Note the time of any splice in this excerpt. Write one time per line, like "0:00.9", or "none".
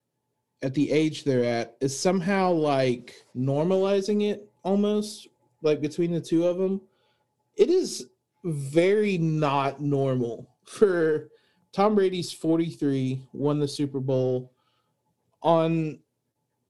0:03.3